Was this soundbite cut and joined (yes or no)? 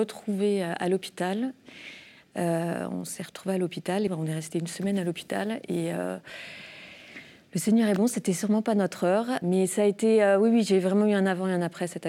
yes